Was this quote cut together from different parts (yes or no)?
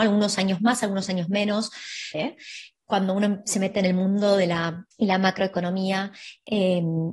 yes